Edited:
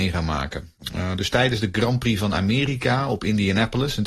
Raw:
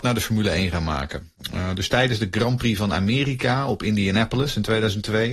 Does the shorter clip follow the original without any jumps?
yes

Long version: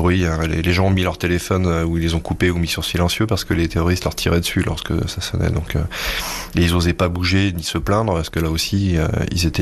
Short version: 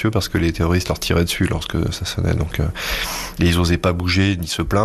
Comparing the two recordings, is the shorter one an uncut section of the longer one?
yes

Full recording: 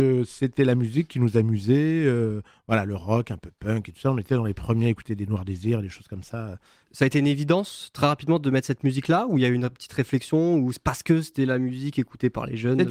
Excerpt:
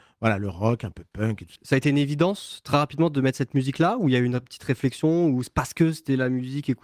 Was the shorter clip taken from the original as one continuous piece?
no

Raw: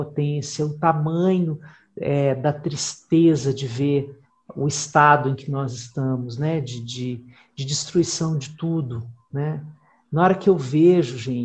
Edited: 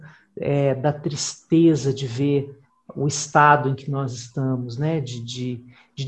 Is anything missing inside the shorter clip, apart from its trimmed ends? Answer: no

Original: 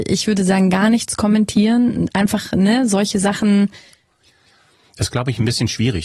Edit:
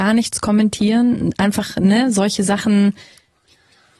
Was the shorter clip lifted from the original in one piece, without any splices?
yes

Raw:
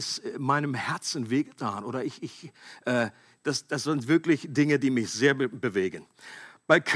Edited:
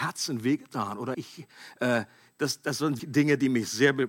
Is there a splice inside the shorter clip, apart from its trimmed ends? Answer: yes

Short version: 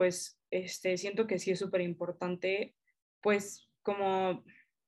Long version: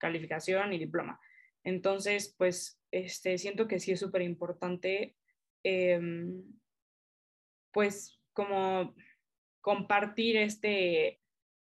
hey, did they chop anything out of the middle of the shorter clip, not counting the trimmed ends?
yes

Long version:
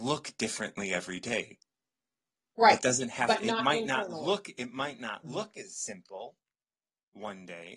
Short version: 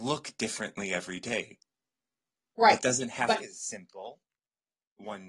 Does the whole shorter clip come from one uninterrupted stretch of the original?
no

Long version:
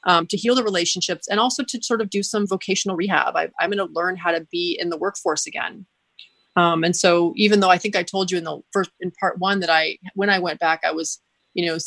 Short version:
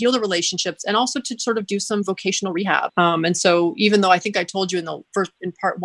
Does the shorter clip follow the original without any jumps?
no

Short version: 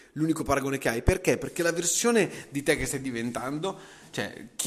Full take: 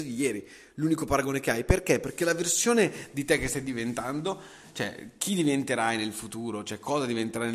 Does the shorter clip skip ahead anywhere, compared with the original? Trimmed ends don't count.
no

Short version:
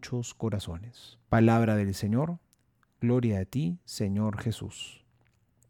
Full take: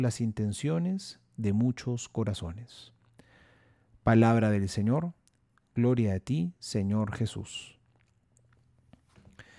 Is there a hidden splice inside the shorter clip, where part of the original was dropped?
yes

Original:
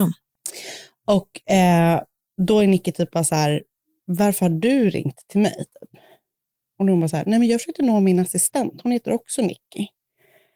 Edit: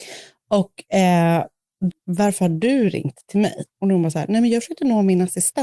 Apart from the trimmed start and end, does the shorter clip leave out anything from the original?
yes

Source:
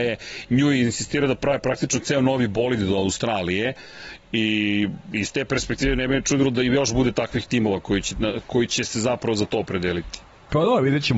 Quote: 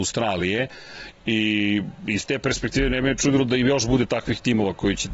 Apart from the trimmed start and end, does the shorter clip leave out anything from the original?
no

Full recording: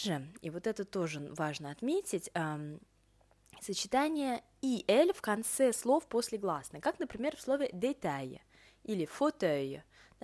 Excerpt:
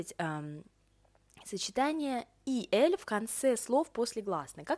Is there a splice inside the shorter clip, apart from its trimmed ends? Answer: no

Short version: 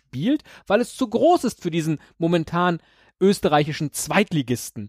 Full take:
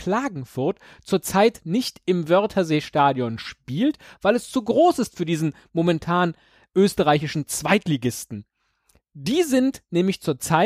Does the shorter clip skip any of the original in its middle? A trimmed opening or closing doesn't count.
no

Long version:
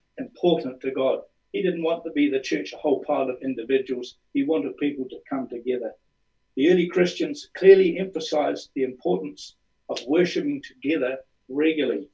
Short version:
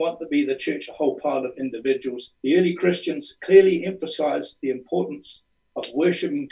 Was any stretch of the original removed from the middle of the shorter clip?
yes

